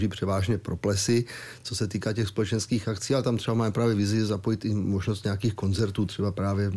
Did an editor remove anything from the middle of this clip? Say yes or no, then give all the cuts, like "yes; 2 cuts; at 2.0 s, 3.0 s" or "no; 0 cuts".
no; 0 cuts